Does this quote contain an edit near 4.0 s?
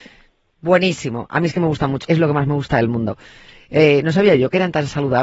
no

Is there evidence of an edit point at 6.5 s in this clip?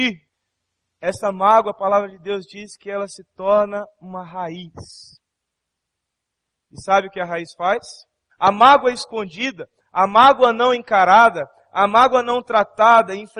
no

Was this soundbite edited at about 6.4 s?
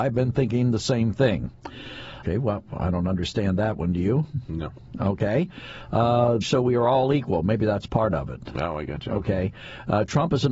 yes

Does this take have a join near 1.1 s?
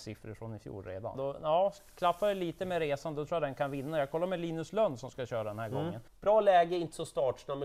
yes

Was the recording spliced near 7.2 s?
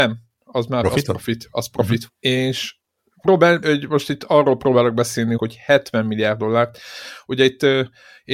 no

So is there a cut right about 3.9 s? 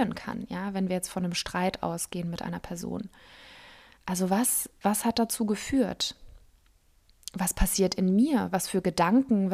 no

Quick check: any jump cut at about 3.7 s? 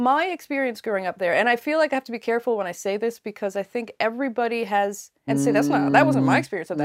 no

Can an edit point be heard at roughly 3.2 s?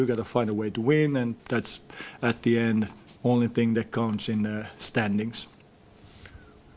yes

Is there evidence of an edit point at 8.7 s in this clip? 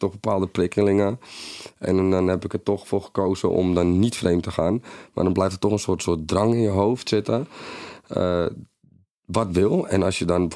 no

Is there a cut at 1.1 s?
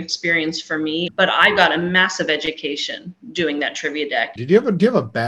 yes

